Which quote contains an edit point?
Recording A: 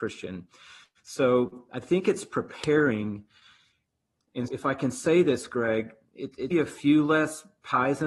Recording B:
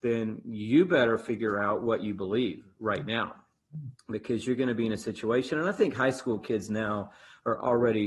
A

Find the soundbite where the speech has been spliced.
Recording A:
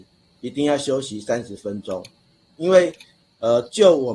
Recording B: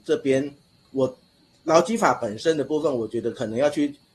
A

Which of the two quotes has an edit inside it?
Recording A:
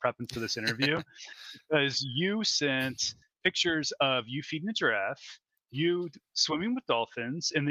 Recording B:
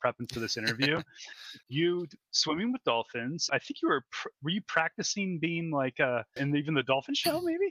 B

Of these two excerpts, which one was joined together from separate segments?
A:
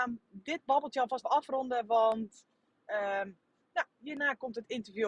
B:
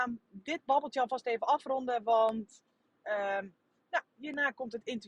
A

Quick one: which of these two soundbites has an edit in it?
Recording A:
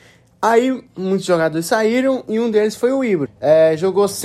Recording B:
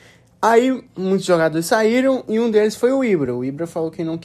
A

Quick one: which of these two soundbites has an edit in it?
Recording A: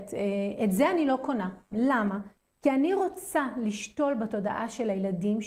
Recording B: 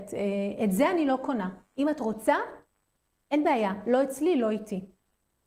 A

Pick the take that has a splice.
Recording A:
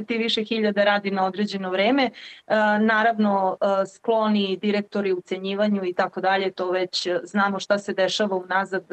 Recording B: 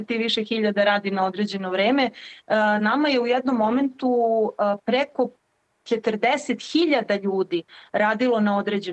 B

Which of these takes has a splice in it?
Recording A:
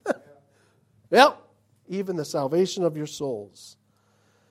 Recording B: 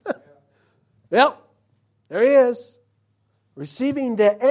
A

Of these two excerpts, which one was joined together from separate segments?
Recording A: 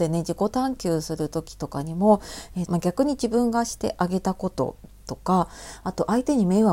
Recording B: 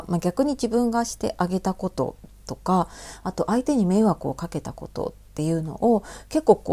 A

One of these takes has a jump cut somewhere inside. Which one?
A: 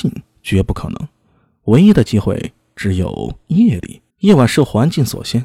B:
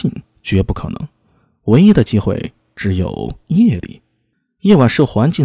A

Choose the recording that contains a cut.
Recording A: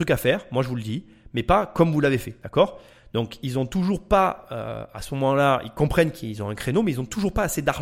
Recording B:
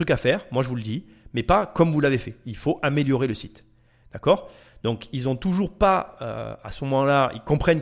A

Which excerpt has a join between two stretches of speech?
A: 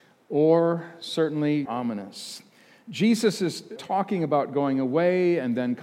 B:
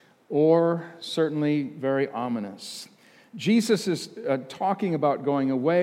A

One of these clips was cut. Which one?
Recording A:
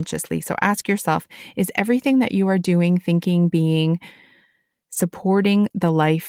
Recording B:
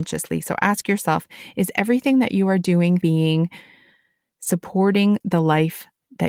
B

